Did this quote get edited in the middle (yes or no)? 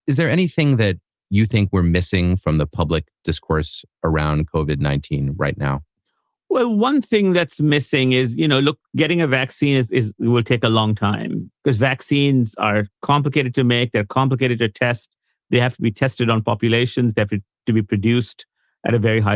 no